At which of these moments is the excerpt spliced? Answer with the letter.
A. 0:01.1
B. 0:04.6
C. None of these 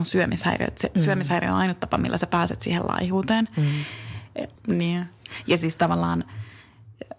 B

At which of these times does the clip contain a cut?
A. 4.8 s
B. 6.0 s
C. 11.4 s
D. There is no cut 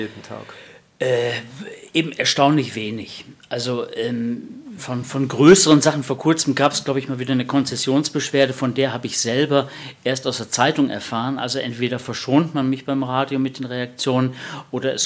A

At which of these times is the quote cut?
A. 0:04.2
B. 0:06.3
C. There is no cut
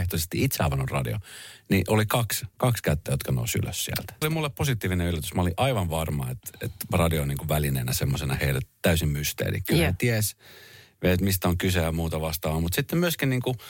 A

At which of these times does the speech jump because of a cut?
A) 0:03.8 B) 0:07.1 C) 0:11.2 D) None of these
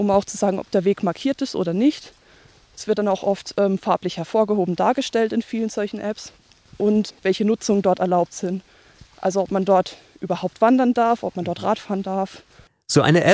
B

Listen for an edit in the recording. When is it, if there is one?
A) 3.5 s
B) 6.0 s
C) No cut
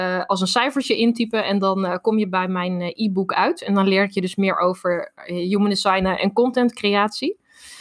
B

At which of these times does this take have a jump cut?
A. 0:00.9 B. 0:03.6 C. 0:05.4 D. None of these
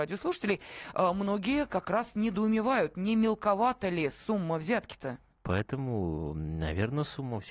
C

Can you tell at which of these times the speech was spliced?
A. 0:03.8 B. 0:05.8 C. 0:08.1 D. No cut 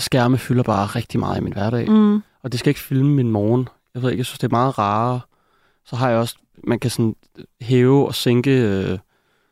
C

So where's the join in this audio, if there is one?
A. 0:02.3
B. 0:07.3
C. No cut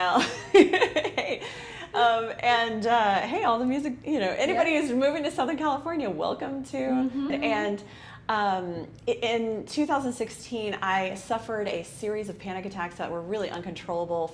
B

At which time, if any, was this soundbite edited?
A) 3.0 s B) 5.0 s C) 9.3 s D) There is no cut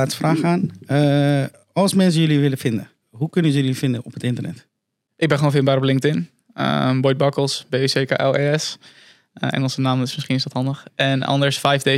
A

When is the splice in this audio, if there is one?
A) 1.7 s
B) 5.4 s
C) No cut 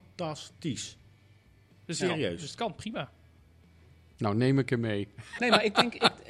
B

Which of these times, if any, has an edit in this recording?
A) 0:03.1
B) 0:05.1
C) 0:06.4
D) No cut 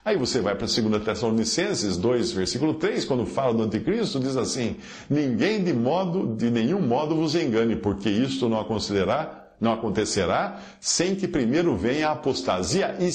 D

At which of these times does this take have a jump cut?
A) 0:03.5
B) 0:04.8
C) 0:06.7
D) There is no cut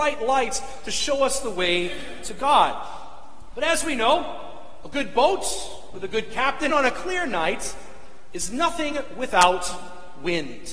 C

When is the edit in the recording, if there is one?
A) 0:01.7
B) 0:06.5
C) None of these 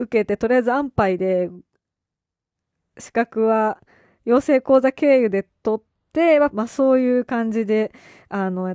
B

